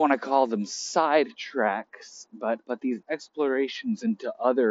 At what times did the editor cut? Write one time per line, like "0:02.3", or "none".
0:02.6